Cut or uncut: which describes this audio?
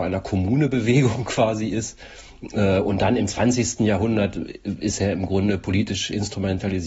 uncut